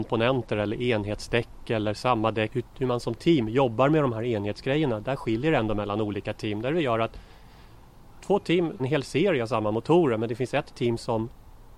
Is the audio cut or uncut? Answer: cut